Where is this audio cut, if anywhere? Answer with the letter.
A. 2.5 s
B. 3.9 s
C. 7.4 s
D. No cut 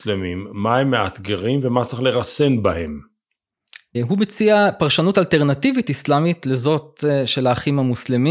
B